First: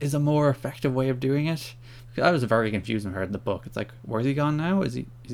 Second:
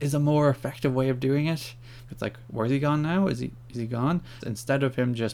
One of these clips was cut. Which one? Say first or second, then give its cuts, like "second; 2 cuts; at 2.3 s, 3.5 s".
second; 2 cuts; at 2.1 s, 4.4 s